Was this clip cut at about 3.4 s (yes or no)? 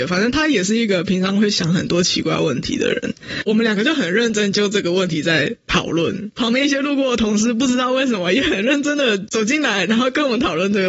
yes